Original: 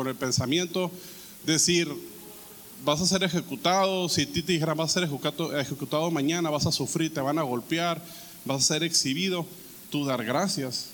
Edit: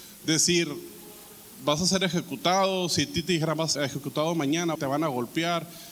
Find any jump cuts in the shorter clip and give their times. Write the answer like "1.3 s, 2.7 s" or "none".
3.8 s, 4.8 s

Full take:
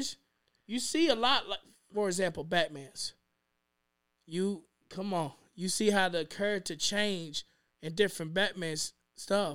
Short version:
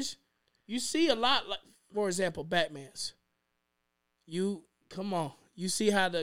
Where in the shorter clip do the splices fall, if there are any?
none

